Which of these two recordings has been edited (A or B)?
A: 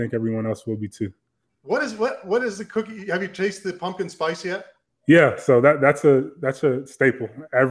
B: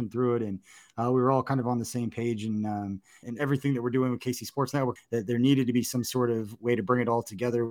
B